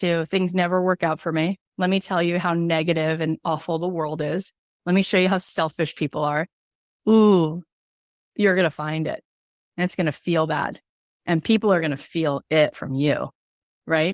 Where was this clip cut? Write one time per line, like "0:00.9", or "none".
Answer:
0:01.7